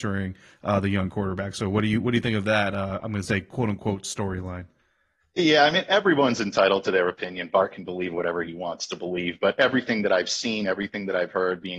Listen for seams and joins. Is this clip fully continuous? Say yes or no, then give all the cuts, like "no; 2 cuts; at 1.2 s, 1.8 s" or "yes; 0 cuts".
yes; 0 cuts